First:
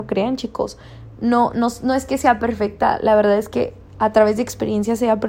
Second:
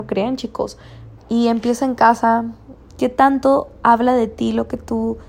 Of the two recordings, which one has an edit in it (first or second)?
second